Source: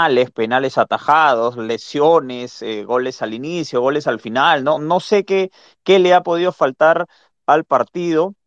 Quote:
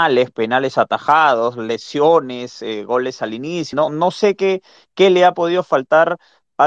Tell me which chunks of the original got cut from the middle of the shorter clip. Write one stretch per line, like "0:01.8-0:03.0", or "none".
0:03.7-0:04.6